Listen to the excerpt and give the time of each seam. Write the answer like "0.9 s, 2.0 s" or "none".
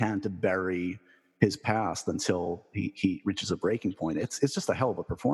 none